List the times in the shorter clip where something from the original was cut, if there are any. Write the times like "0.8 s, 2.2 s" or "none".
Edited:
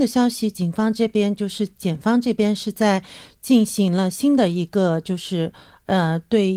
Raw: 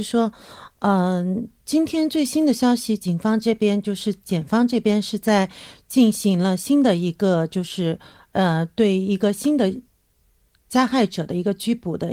none